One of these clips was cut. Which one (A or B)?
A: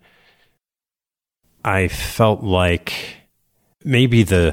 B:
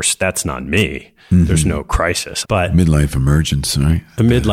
B